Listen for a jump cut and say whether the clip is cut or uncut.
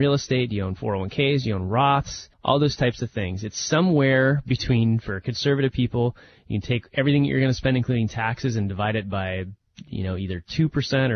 cut